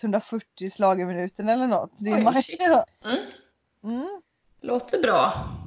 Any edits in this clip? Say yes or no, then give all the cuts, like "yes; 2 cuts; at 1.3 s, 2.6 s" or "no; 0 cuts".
yes; 1 cut; at 2.9 s